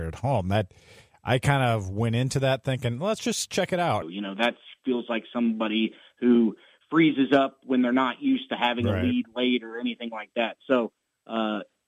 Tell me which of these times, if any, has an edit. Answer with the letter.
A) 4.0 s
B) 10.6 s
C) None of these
A